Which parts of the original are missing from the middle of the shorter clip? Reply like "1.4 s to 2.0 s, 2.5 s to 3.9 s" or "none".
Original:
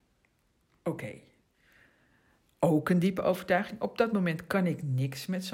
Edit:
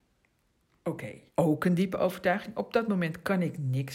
1.3 s to 2.5 s